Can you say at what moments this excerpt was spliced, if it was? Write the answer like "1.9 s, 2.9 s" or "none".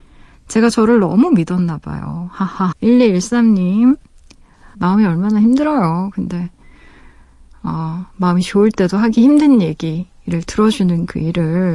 2.7 s, 4.7 s